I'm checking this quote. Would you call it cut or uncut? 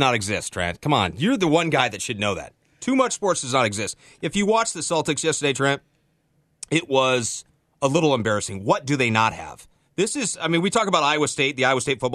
uncut